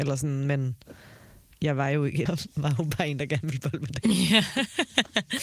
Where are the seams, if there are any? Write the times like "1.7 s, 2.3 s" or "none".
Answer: 2.3 s